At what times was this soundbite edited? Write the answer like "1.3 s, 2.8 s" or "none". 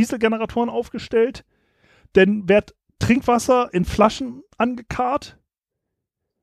none